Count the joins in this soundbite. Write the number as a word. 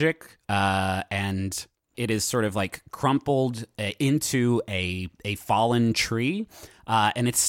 one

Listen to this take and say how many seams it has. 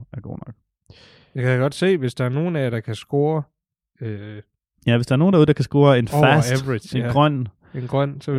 zero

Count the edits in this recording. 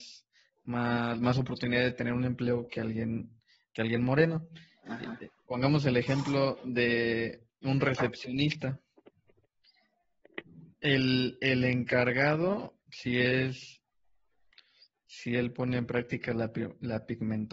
one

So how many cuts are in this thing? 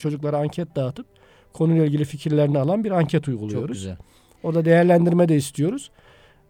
zero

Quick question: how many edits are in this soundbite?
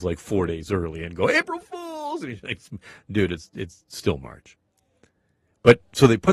zero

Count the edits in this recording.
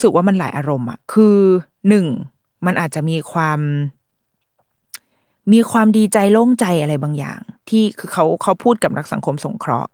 two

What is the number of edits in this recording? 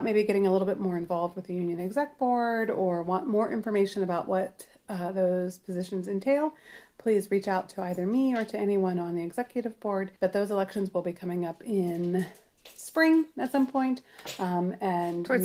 one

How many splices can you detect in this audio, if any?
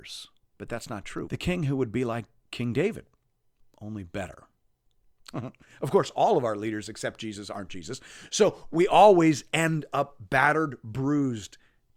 two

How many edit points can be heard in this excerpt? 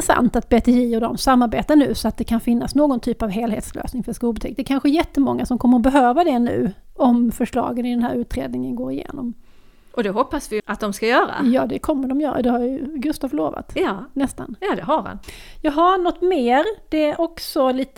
two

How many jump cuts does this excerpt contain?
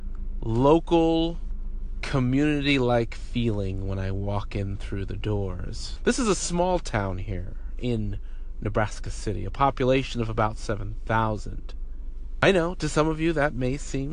one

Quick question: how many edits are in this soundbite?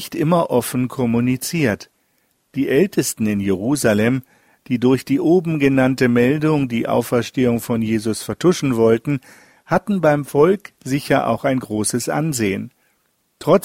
zero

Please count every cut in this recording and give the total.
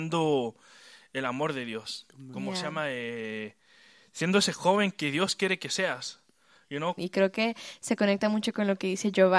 one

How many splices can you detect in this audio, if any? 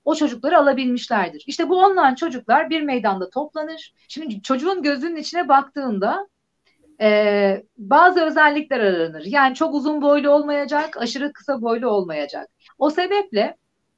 two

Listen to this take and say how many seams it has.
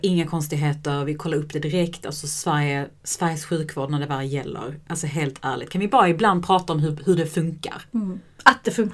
zero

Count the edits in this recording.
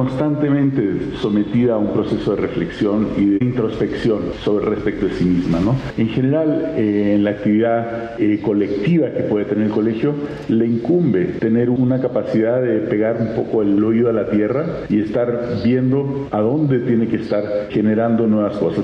zero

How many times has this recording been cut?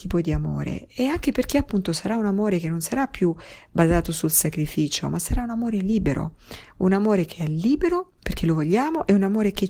one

